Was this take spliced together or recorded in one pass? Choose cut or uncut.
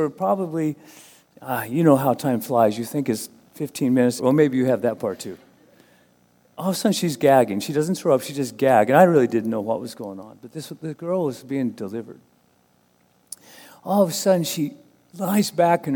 cut